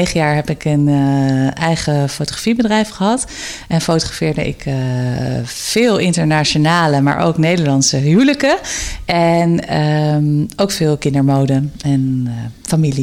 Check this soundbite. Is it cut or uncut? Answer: uncut